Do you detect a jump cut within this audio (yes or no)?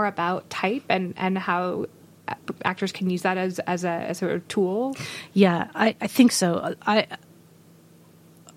no